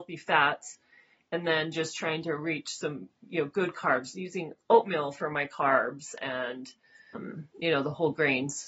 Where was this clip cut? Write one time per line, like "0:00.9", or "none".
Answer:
none